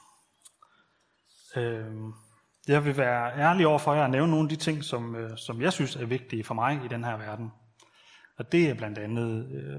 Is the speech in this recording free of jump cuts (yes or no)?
yes